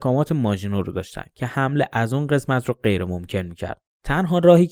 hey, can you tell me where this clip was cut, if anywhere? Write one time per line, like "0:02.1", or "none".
none